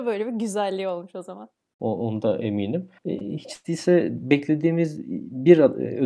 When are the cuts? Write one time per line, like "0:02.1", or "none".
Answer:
0:03.0